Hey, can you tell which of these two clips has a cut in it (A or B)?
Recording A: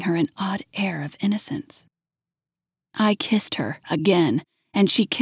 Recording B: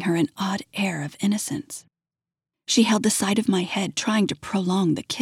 B